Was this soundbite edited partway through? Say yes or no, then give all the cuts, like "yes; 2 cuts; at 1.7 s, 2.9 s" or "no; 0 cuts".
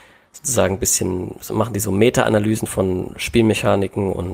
no; 0 cuts